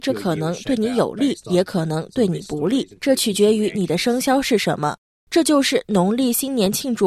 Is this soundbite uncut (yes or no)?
yes